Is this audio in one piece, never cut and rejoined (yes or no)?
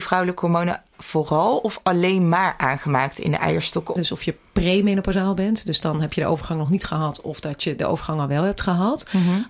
no